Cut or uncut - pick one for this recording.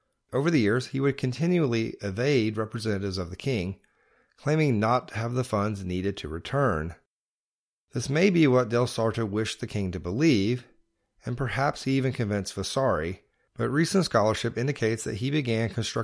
uncut